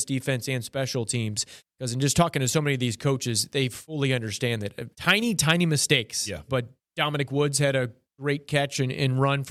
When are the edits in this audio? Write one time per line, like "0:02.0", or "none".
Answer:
0:04.9
0:06.5

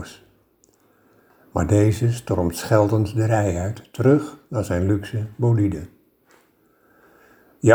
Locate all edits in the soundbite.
none

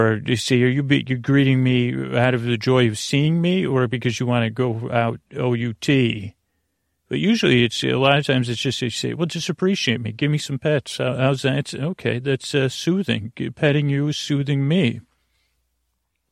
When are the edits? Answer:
none

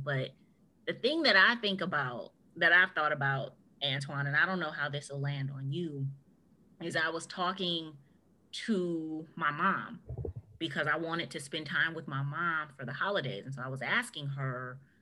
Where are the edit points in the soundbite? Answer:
none

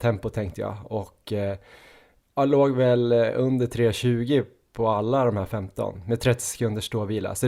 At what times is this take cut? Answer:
none

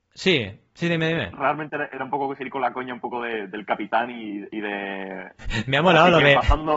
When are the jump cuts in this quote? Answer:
0:05.4

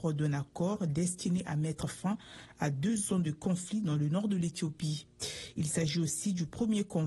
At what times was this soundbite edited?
none

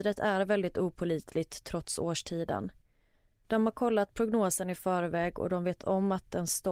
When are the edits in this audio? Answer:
none

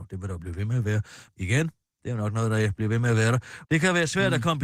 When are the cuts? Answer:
0:01.3
0:03.6

